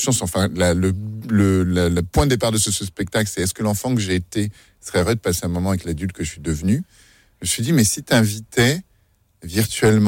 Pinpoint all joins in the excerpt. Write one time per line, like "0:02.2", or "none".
none